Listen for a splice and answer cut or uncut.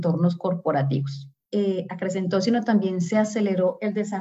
cut